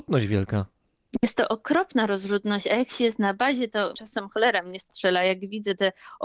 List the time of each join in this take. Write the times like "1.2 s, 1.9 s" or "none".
none